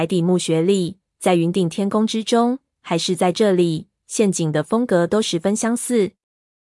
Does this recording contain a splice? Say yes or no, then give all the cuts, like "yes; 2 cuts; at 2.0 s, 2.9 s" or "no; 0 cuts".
no; 0 cuts